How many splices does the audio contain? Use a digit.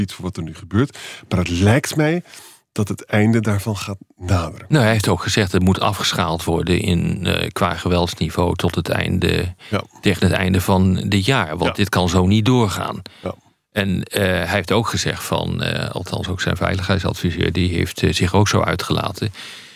0